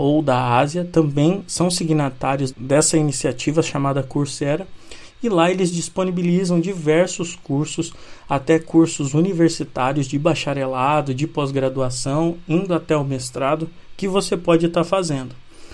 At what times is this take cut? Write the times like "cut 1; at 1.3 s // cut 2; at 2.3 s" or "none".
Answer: cut 1; at 2.5 s